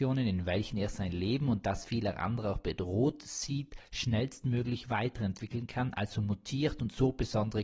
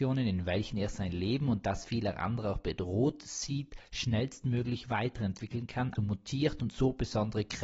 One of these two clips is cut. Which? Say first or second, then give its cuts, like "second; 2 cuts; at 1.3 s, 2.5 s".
second; 1 cut; at 5.9 s